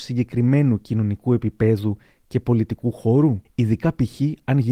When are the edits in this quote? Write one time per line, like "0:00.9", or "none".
0:03.5